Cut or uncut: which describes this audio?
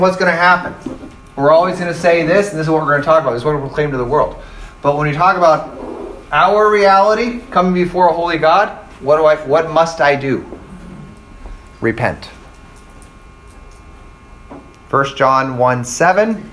uncut